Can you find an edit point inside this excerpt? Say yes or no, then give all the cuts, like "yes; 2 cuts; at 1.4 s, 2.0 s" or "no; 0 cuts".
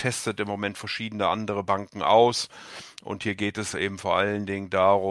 no; 0 cuts